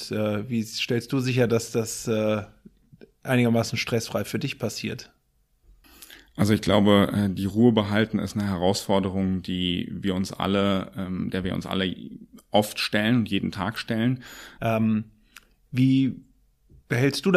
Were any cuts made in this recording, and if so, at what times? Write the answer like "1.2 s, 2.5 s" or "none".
14.6 s